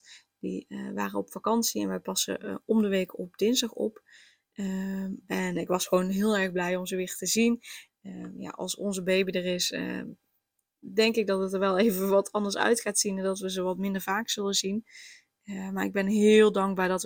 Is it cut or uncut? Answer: cut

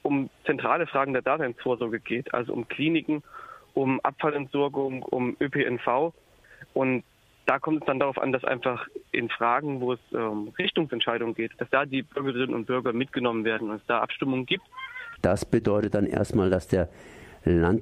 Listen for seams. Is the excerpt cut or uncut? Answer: cut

